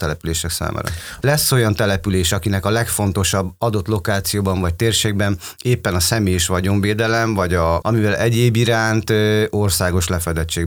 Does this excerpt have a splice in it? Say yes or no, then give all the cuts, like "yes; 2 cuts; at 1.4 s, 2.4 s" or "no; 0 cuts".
yes; 2 cuts; at 1.2 s, 7.8 s